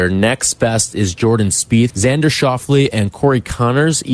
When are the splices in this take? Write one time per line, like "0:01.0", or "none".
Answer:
0:01.9

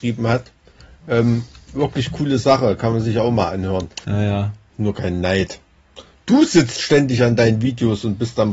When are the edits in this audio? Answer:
0:04.0

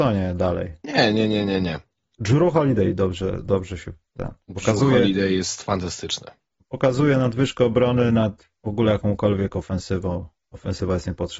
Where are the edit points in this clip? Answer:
none

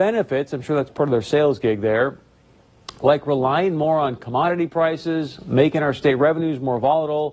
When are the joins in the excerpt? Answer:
none

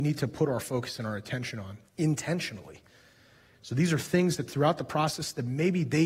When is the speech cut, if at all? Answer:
0:03.5

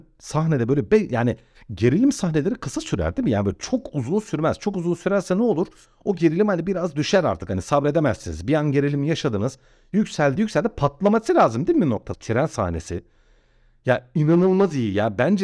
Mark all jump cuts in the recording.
0:10.4
0:12.1

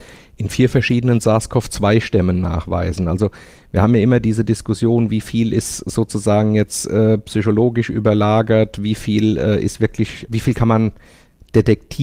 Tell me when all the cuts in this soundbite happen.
0:10.3

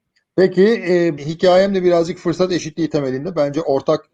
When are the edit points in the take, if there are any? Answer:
0:01.2

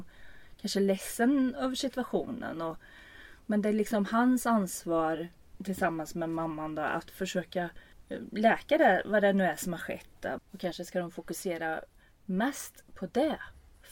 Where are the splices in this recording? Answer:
0:10.4

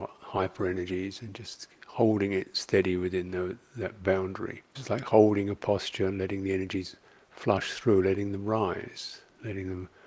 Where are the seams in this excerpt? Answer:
0:04.7

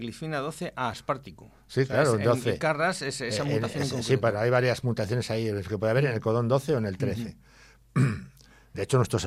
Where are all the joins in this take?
none

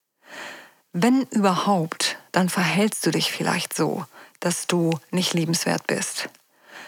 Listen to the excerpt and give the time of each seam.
none

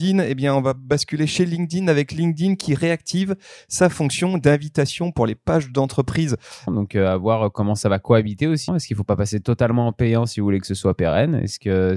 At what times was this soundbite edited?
0:06.7
0:08.7

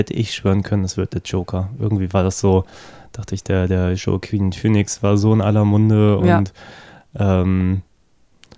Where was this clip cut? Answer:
none

